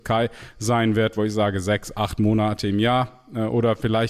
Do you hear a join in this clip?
no; 0 cuts

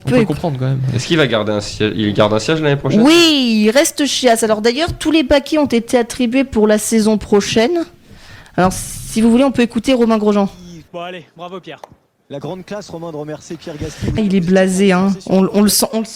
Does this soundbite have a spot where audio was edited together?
yes; 3 cuts; at 8.4 s, 10.9 s, 14.2 s

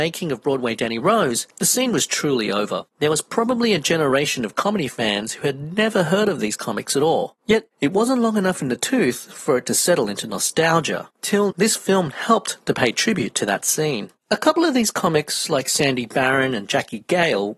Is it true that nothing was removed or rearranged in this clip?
no; 1 cut; at 11.5 s

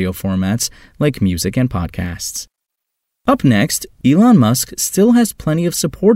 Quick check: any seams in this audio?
yes; 1 cut; at 4.0 s

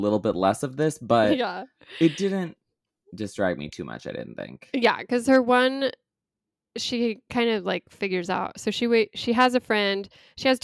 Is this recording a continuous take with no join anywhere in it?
yes; 0 cuts

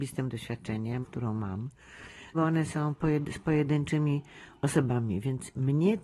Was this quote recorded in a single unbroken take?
no; 2 cuts; at 1.0 s, 2.3 s

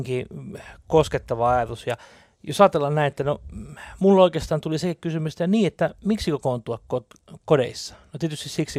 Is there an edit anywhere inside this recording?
no; 0 cuts

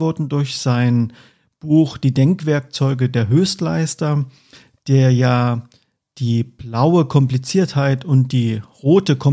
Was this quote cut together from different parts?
no; 0 cuts

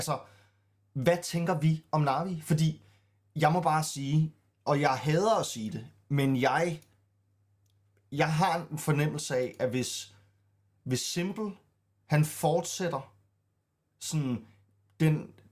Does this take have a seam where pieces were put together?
no; 0 cuts

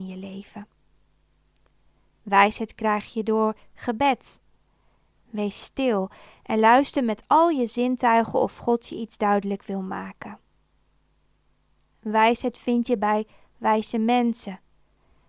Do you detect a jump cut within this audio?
no; 0 cuts

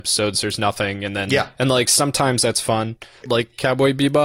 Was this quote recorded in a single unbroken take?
no; 2 cuts; at 1.6 s, 3.2 s

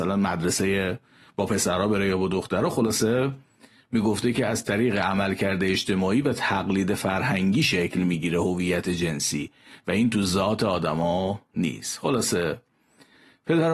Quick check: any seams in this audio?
no; 0 cuts

